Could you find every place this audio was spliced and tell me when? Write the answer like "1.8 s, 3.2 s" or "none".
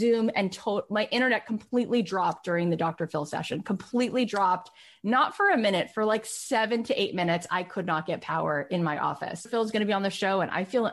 9.5 s